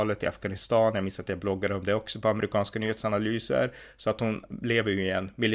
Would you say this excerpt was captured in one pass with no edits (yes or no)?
yes